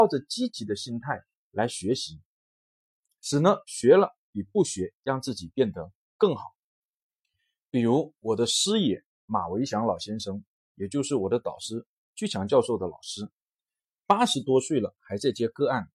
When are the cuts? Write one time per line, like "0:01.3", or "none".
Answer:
none

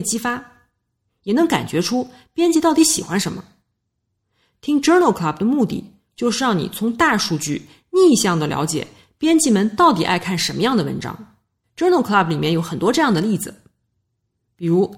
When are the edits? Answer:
0:01.1
0:11.6

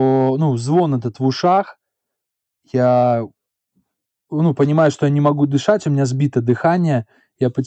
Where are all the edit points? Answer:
none

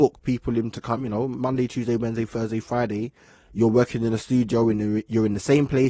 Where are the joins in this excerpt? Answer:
none

